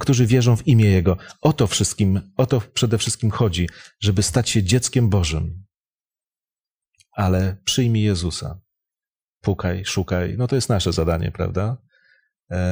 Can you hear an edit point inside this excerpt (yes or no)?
no